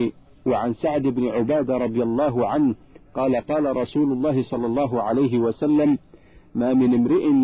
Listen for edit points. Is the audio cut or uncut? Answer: uncut